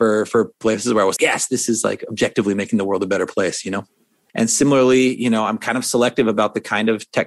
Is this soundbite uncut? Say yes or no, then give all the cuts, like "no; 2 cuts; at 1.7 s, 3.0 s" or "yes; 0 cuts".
no; 2 cuts; at 1.2 s, 4.3 s